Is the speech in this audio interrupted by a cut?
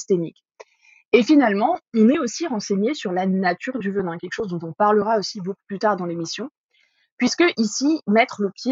no; 0 cuts

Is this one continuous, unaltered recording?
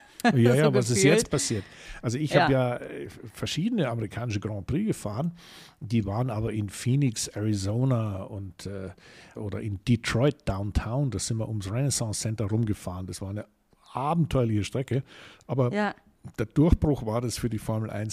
no; 1 cut; at 9.4 s

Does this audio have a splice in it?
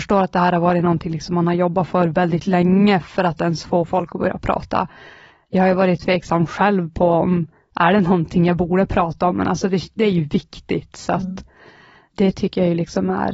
no; 0 cuts

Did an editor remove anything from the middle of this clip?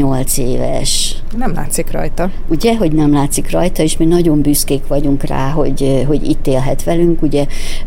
no; 0 cuts

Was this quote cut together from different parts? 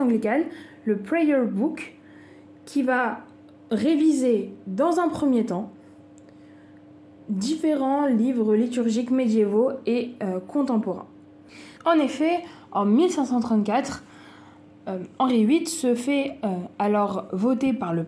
yes; 1 cut; at 11.8 s

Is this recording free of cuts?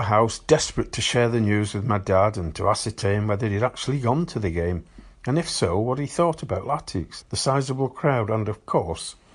no; 1 cut; at 7.2 s

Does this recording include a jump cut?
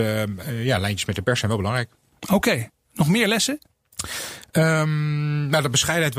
no; 0 cuts

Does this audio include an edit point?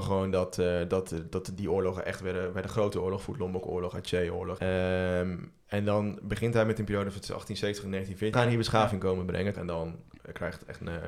yes; 3 cuts; at 4.6 s, 8.3 s, 9.5 s

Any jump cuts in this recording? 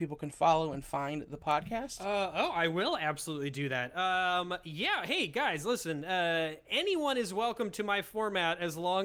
no; 0 cuts

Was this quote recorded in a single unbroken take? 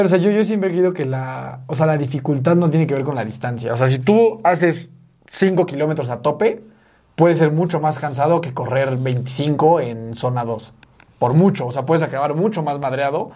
yes; 0 cuts

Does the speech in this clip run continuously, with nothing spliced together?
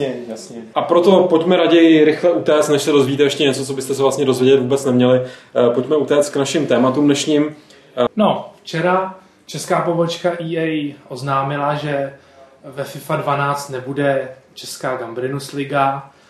no; 1 cut; at 8.1 s

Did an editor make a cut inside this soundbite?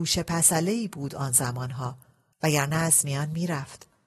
yes; 1 cut; at 2.3 s

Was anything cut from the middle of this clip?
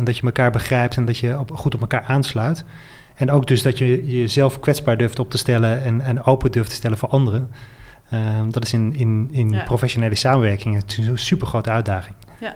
no; 0 cuts

